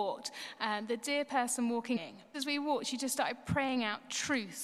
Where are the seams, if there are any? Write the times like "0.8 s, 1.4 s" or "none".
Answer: 2.3 s